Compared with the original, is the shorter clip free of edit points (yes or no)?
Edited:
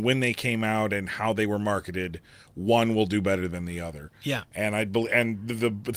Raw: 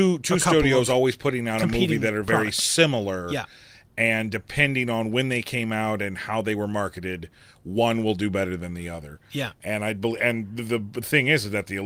yes